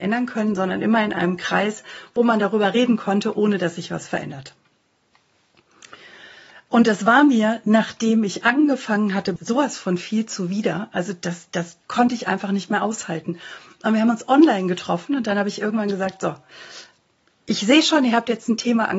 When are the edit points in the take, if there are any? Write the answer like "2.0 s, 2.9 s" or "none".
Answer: 9.4 s